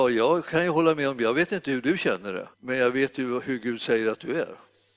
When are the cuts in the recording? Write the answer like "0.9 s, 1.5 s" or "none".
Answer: 2.5 s